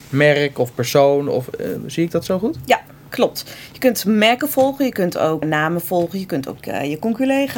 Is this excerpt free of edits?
no; 1 cut; at 5.4 s

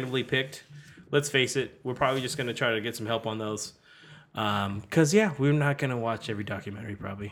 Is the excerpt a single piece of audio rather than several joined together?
yes; 0 cuts

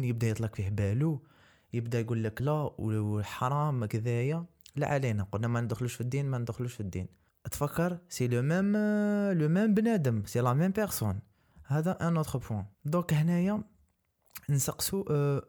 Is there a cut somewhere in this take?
yes; 2 cuts; at 2.4 s, 12.7 s

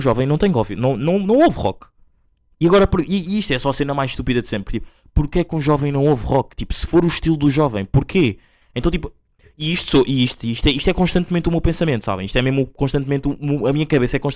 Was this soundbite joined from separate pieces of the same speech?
no; 0 cuts

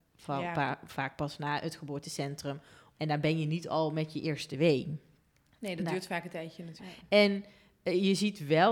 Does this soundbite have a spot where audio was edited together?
yes; 2 cuts; at 2.9 s, 6.8 s

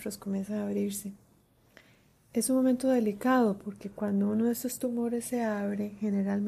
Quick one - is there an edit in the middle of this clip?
no; 0 cuts

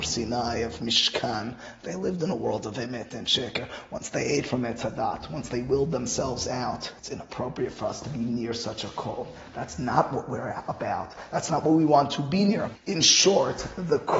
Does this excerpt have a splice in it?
yes; 2 cuts; at 7.0 s, 12.7 s

